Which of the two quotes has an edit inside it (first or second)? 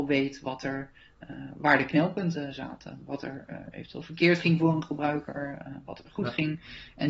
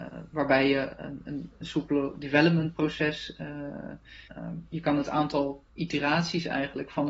second